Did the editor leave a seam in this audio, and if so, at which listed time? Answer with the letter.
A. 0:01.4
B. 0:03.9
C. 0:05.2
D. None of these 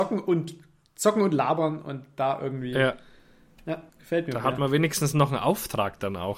B